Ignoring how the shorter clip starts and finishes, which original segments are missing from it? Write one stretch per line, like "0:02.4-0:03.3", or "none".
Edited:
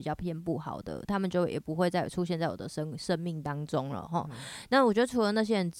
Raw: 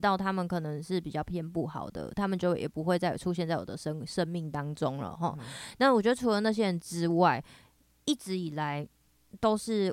none